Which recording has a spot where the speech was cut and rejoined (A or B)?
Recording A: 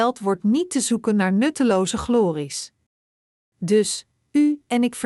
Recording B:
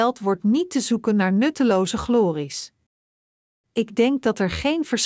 A